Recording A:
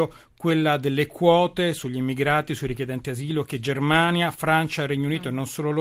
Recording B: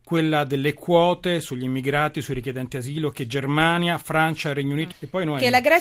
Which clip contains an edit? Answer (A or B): B